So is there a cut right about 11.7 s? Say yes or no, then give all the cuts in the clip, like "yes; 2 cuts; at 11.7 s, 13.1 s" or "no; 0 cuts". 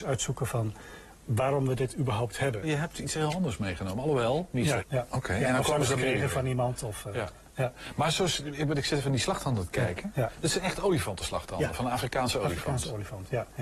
no; 2 cuts; at 2.6 s, 4.8 s